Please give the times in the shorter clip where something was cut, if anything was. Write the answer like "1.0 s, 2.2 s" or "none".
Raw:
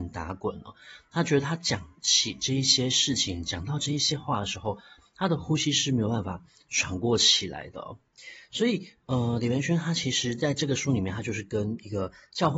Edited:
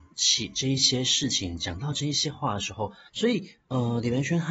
3.1 s